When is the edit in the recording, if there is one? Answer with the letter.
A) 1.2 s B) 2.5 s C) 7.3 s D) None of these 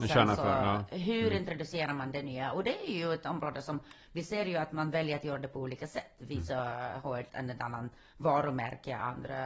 C